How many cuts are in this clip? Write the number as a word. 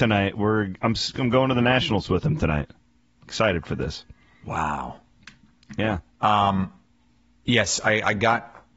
zero